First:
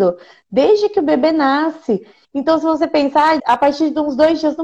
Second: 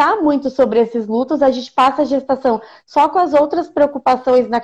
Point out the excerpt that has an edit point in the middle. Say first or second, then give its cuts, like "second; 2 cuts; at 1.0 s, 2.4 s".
first; 2 cuts; at 2.2 s, 3.4 s